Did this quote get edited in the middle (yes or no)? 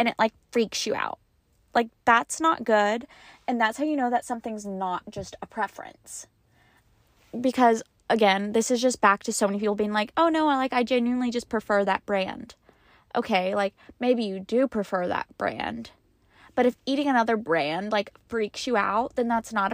no